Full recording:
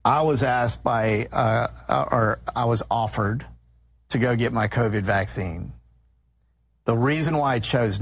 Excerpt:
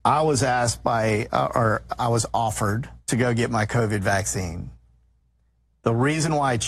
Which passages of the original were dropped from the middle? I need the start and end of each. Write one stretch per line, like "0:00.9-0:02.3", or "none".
0:01.3-0:01.9
0:03.6-0:04.0